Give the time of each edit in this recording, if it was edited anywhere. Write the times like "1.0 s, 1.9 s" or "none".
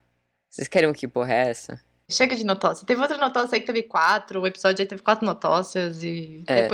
2.1 s